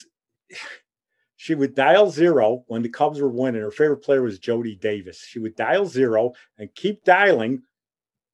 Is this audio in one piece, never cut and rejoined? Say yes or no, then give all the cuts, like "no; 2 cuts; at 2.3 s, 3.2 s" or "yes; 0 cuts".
yes; 0 cuts